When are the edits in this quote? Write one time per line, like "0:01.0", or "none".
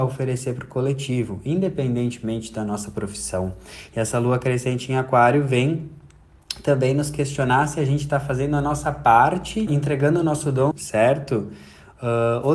0:09.7
0:10.7